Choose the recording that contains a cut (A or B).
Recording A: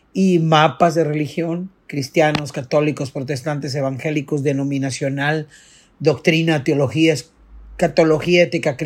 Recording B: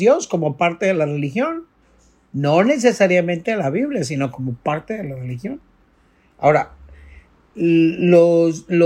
A